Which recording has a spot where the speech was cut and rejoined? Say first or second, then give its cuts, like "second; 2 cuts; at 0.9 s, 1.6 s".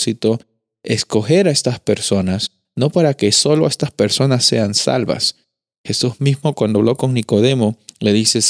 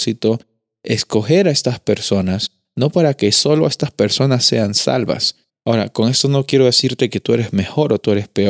second; 1 cut; at 5.5 s